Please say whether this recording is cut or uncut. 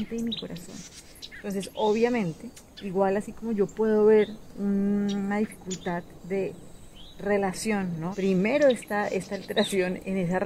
cut